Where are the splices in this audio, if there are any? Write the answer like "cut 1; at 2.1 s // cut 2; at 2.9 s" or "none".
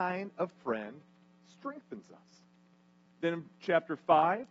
cut 1; at 3.1 s